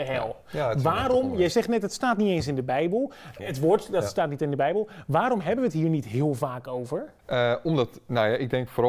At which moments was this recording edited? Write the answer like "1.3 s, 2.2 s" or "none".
3.4 s, 7.2 s